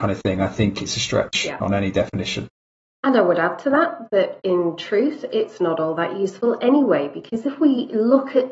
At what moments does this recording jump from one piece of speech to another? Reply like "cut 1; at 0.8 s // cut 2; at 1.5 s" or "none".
none